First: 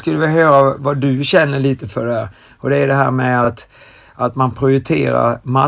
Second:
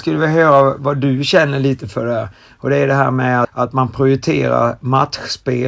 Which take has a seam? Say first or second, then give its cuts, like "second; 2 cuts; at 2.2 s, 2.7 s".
second; 1 cut; at 3.4 s